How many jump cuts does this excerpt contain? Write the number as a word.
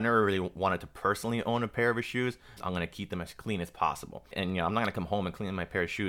two